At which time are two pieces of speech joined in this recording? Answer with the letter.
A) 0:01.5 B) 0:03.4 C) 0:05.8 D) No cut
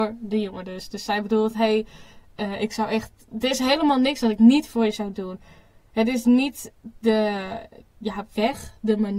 D